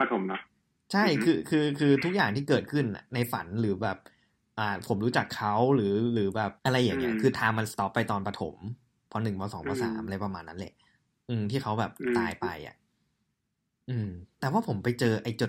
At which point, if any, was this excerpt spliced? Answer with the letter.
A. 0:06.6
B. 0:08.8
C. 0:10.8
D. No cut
A